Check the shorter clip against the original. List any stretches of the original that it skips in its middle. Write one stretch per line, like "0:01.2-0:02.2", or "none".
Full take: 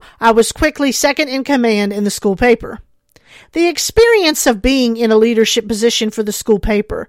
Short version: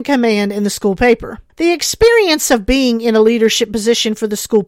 0:02.9-0:03.5